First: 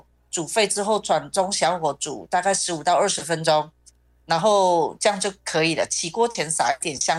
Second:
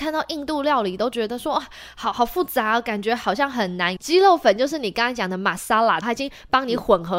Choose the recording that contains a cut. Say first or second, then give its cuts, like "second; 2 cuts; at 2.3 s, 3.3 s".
second; 2 cuts; at 4.0 s, 6.0 s